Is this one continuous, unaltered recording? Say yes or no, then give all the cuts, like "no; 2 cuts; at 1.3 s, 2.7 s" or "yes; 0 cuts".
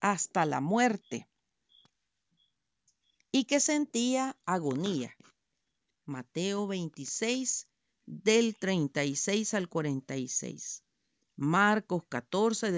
yes; 0 cuts